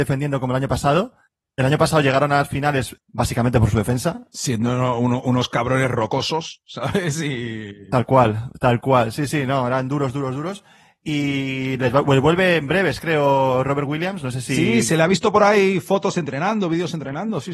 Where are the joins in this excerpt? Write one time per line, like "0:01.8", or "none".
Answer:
none